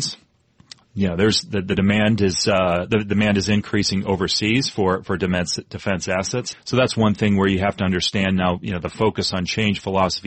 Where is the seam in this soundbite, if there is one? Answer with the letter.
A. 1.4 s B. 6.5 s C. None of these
B